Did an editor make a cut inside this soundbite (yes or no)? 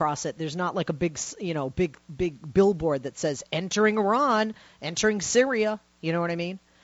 no